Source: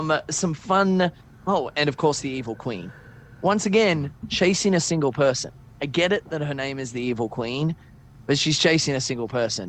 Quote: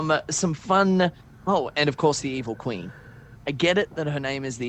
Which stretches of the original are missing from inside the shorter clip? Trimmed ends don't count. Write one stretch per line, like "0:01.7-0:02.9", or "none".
0:03.4-0:05.7